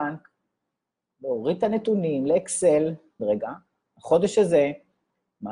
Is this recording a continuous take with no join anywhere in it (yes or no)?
no